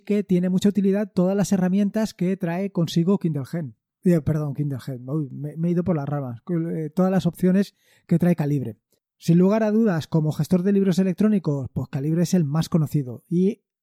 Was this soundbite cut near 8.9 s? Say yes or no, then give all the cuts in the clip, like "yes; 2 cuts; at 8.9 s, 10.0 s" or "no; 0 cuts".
no; 0 cuts